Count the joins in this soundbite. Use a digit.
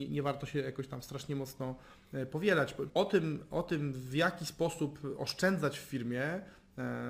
1